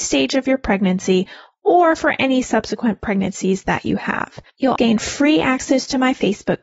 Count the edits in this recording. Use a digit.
1